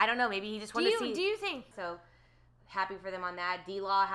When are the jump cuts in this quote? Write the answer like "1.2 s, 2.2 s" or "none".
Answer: 1.7 s